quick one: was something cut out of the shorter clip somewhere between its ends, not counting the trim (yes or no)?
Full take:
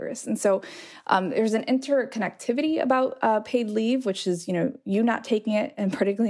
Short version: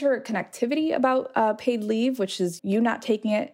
yes